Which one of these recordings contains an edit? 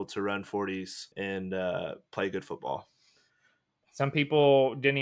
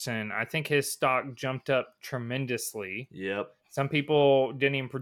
first; 2 cuts; at 1.1 s, 3.8 s

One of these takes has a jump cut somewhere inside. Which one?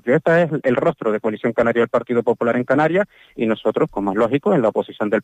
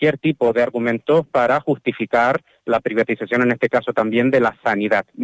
first; 1 cut; at 3.9 s

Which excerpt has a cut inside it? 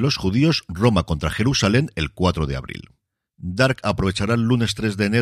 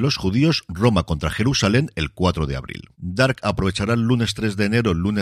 second; 1 cut; at 2.9 s

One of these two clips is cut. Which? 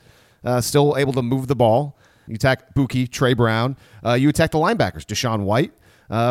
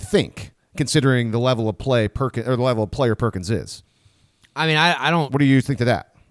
first; 1 cut; at 2.3 s

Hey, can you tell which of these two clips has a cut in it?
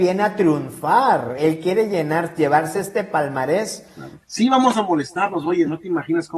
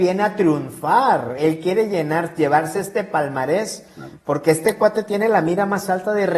first; 1 cut; at 4.2 s

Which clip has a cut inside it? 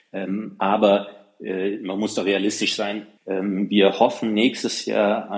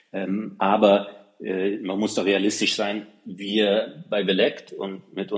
first; 1 cut; at 3.2 s

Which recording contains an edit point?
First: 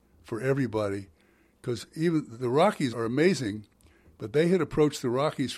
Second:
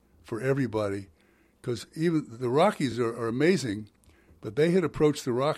first; 1 cut; at 2.9 s

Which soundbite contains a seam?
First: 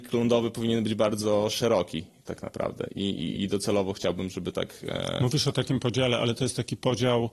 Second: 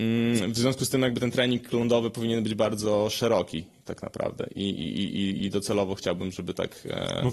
first; 1 cut; at 3.4 s

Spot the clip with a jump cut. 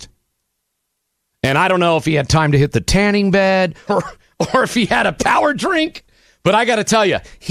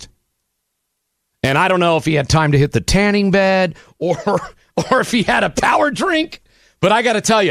first; 1 cut; at 3.9 s

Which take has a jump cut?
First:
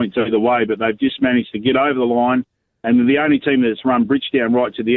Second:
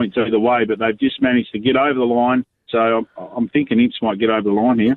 second; 1 cut; at 2.7 s

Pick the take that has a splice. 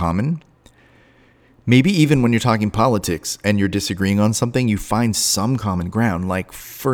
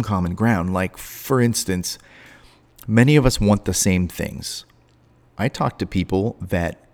second; 1 cut; at 5.2 s

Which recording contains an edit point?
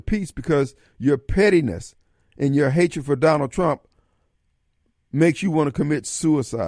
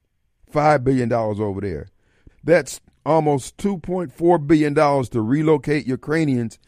second; 1 cut; at 2.3 s

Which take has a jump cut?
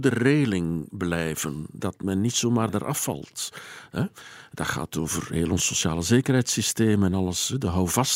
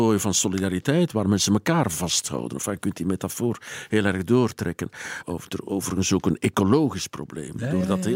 second; 1 cut; at 5.2 s

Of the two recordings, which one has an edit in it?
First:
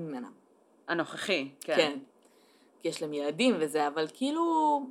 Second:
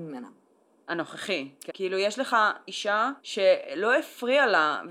second; 2 cuts; at 1.7 s, 3.2 s

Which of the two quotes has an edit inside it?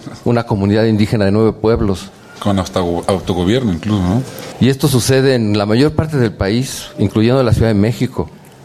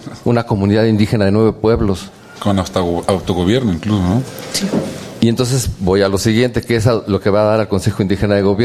first; 1 cut; at 4.5 s

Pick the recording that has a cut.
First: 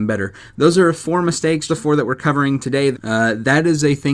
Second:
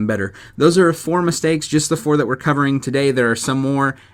first; 2 cuts; at 1.7 s, 2.9 s

